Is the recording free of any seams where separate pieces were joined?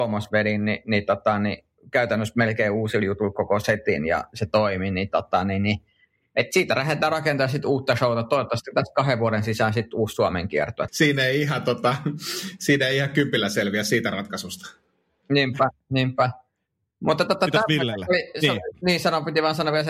no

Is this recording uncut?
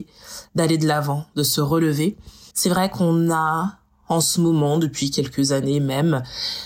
no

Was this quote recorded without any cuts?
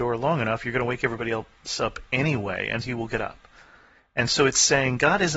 no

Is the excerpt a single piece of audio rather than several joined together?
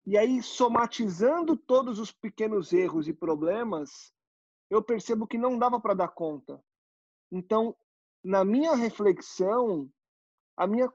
yes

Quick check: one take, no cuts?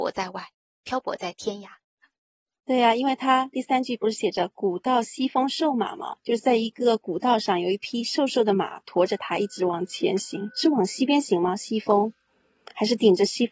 yes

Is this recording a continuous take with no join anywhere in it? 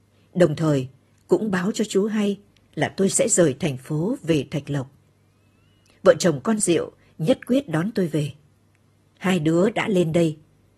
yes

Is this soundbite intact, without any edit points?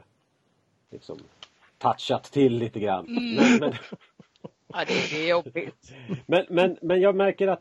no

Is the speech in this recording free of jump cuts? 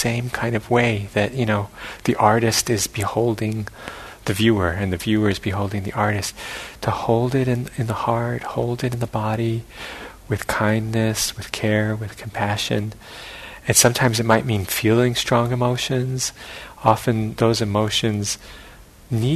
yes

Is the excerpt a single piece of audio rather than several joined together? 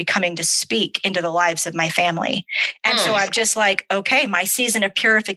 yes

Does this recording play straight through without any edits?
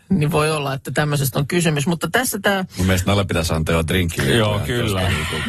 yes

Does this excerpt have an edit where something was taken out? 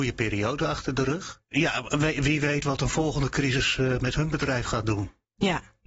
yes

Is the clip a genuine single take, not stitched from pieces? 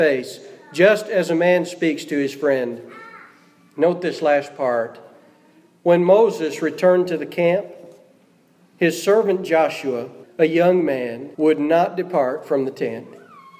no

